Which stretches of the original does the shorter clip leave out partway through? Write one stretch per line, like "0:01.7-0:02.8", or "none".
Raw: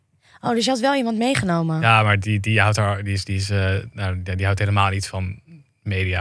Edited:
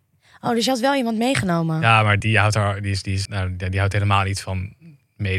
0:02.2-0:02.4
0:03.5-0:03.9